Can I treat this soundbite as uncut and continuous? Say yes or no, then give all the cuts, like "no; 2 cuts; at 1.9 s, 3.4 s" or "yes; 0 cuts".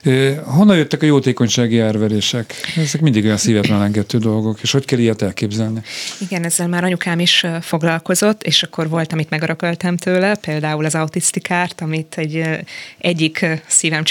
yes; 0 cuts